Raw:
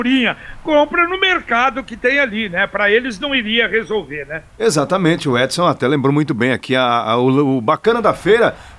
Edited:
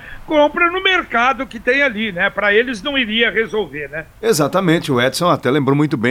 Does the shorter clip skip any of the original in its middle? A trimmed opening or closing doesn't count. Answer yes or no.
no